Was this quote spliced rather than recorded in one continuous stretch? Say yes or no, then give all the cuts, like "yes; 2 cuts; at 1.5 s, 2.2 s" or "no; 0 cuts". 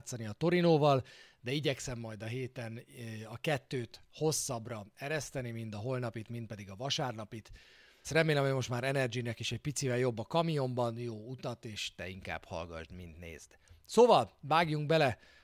yes; 1 cut; at 8.0 s